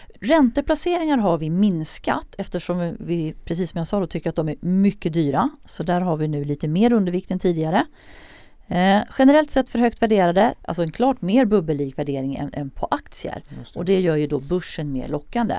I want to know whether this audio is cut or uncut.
cut